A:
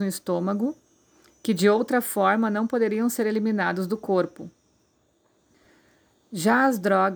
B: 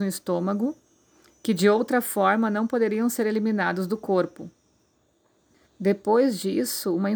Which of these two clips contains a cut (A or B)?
B